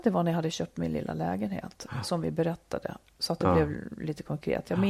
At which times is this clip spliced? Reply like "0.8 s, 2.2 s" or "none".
none